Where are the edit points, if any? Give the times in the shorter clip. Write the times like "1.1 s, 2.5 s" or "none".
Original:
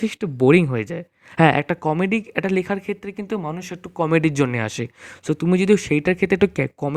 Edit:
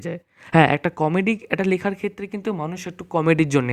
none